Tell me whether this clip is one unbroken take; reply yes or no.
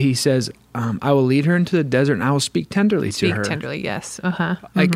yes